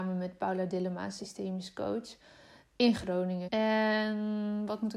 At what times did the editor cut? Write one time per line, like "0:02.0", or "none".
0:03.5